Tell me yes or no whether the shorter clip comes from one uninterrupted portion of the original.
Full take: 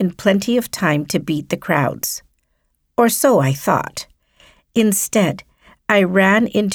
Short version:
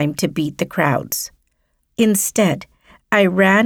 no